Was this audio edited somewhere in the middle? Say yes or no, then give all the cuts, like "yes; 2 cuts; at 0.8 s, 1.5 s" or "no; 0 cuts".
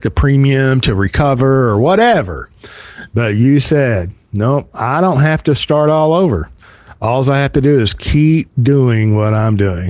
no; 0 cuts